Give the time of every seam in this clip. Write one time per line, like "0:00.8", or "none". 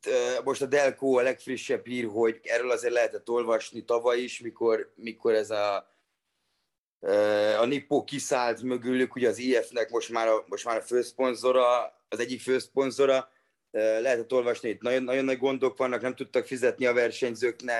0:02.4